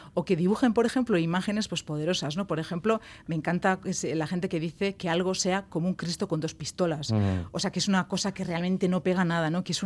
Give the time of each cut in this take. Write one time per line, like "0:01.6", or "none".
none